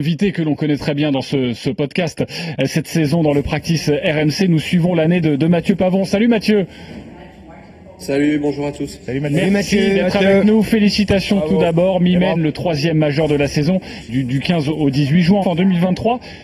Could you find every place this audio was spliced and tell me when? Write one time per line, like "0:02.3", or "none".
0:12.3
0:14.1
0:15.4